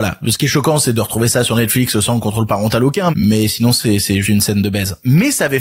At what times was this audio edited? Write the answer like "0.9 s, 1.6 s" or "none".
3.1 s, 4.2 s